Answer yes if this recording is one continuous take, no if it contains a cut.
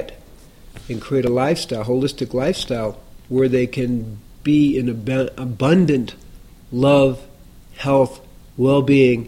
no